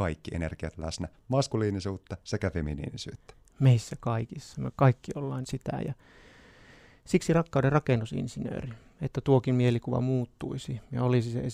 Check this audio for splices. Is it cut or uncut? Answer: cut